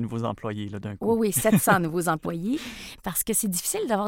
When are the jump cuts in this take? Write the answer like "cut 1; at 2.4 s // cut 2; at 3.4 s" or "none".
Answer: cut 1; at 2.9 s